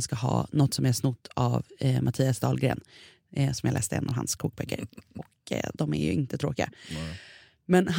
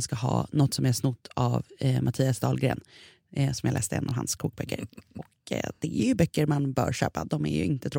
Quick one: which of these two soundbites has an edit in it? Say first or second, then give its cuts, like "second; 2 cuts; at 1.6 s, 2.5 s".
first; 1 cut; at 5.7 s